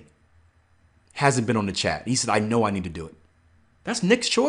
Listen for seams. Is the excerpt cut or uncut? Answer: uncut